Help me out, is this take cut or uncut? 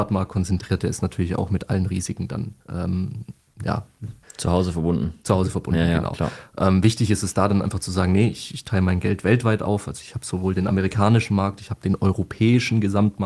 cut